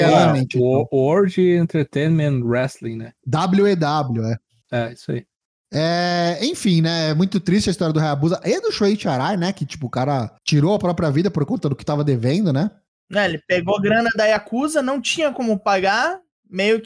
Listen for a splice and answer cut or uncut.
uncut